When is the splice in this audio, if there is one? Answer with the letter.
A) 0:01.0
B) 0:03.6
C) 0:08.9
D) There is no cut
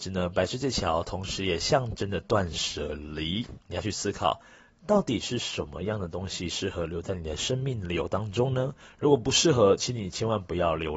B